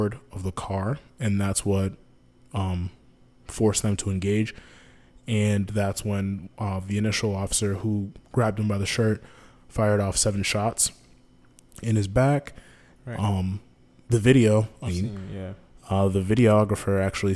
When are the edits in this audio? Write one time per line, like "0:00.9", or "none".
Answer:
0:13.0
0:14.9

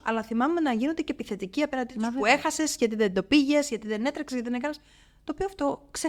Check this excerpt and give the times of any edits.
none

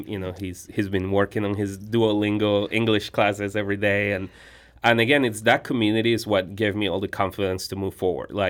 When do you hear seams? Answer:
none

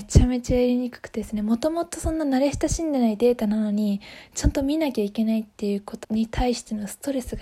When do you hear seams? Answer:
0:06.0

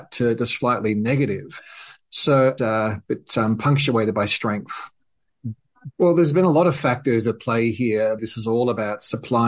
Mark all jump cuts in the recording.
0:02.6
0:05.9
0:08.2

